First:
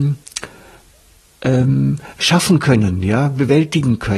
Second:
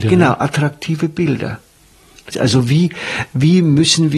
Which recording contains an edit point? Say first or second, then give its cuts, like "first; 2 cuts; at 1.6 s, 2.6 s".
second; 1 cut; at 2.3 s